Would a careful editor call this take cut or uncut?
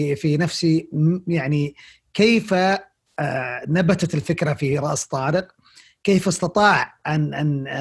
uncut